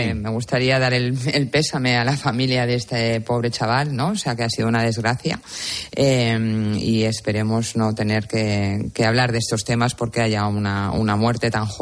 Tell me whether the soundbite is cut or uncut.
uncut